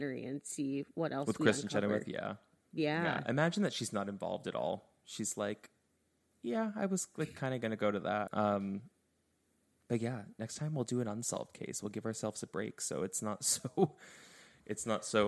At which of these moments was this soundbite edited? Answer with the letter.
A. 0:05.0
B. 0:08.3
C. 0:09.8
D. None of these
B